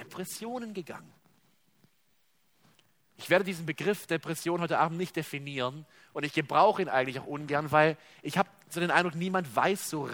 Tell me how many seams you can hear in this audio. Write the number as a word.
zero